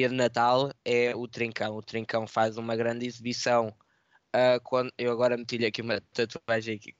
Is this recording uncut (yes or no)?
yes